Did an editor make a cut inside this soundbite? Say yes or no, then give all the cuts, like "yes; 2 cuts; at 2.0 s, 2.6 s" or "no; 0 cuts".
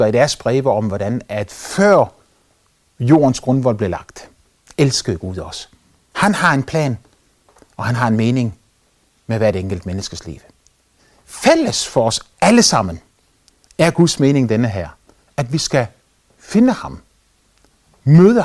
yes; 1 cut; at 6.1 s